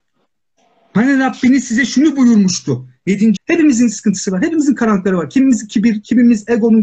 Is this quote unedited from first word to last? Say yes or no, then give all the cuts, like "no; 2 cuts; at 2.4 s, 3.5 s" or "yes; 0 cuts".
no; 1 cut; at 3.4 s